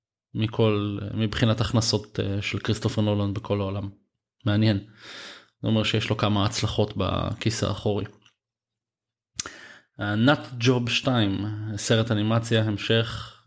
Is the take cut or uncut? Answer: uncut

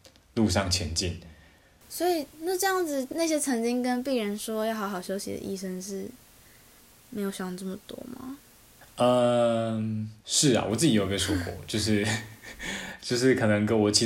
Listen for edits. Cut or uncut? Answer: cut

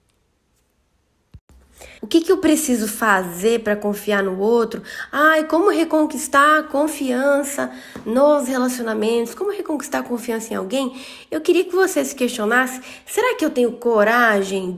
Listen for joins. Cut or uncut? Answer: cut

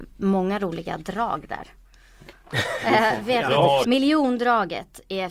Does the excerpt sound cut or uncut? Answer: cut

